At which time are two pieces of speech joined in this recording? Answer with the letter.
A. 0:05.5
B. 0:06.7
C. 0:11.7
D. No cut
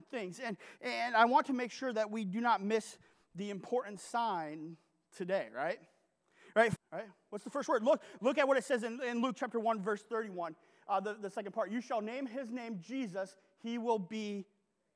B